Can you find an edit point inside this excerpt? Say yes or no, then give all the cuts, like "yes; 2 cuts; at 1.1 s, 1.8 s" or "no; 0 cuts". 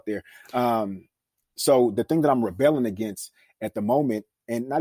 no; 0 cuts